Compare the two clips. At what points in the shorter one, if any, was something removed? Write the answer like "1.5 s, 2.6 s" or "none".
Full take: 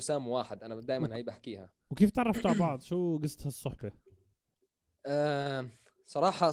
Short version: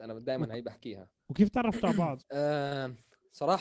2.2 s